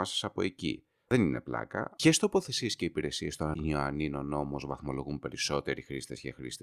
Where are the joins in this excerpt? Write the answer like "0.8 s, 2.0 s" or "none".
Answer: 1.9 s